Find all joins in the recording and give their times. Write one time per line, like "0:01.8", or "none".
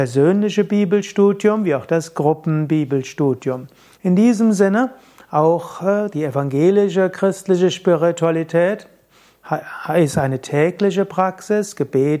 0:04.0